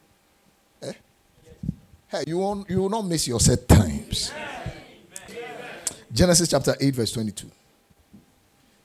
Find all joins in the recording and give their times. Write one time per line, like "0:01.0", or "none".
0:05.3